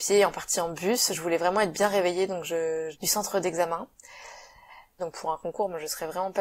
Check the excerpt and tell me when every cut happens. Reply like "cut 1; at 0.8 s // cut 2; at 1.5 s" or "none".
cut 1; at 2.9 s // cut 2; at 5.0 s